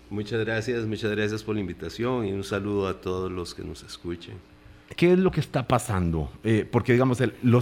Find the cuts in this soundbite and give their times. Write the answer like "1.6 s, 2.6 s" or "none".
5.0 s